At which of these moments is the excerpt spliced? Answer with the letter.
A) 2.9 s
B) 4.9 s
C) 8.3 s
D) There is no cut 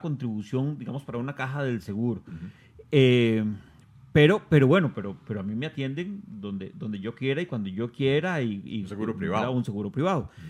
D